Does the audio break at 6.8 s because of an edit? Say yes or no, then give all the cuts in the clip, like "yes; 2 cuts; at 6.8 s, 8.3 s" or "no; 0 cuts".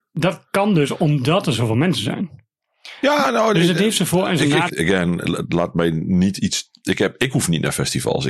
no; 1 cut; at 4.7 s